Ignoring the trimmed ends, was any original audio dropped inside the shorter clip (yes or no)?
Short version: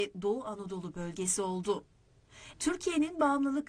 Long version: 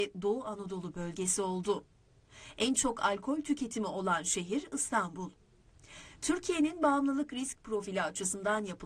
yes